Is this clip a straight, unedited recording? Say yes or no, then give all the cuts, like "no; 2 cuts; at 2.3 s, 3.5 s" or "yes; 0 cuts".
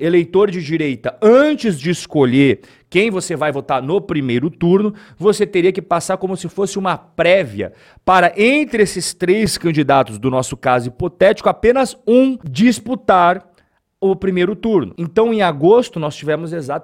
yes; 0 cuts